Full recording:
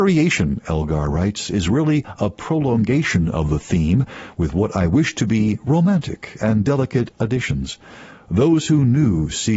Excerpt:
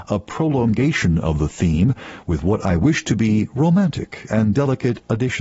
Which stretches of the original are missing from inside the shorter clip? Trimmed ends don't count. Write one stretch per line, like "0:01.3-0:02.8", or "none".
none